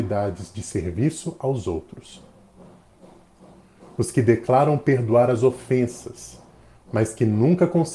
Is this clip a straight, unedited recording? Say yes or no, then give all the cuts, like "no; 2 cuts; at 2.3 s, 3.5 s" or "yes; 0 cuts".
yes; 0 cuts